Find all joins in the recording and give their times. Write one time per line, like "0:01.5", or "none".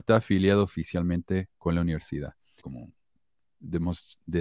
0:02.6